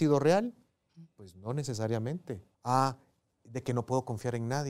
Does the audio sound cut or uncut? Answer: cut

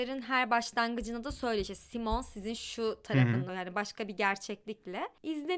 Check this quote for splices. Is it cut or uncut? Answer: cut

